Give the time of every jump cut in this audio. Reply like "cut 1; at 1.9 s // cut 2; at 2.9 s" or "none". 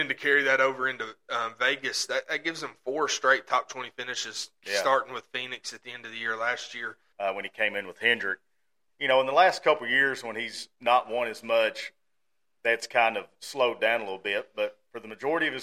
cut 1; at 7.1 s // cut 2; at 8.9 s